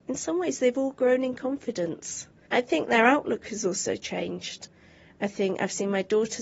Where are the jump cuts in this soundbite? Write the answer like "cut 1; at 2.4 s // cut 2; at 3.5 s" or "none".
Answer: cut 1; at 2.5 s

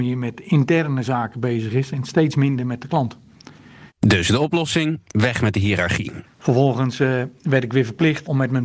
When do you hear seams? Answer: cut 1; at 3.9 s // cut 2; at 6.2 s

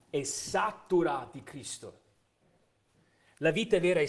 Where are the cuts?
none

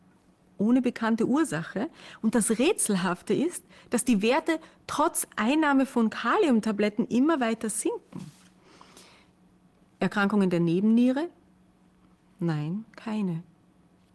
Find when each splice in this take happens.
none

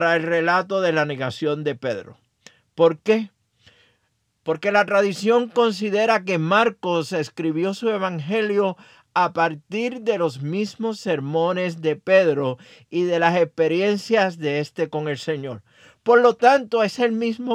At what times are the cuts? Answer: none

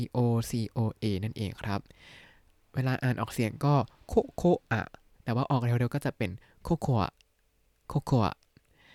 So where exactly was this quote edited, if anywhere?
none

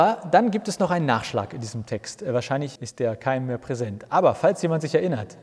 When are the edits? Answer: cut 1; at 2.8 s

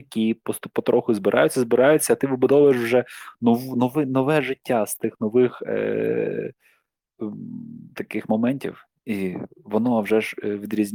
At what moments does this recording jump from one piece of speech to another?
none

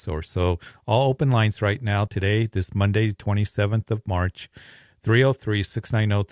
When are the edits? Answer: none

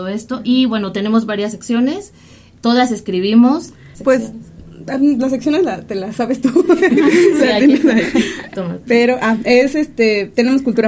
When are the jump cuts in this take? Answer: cut 1; at 3.9 s

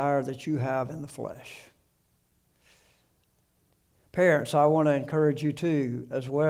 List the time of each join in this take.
none

